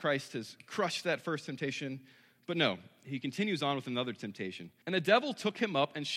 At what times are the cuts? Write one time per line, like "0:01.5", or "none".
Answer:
0:04.8